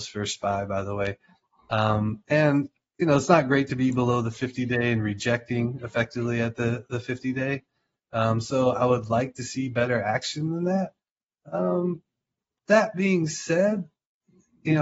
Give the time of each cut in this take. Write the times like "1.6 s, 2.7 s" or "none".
none